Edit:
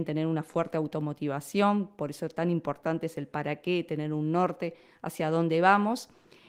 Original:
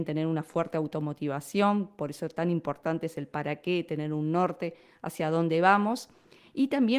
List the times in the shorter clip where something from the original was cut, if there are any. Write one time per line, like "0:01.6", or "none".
none